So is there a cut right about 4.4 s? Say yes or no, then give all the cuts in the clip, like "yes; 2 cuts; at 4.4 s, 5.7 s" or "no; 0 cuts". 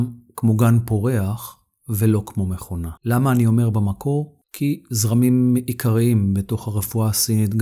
yes; 2 cuts; at 3.0 s, 4.4 s